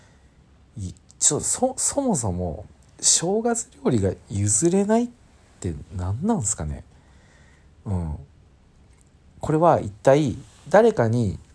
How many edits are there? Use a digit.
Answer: 0